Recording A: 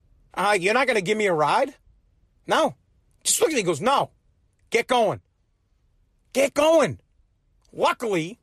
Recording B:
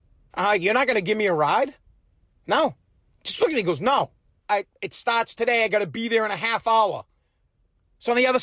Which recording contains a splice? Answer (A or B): B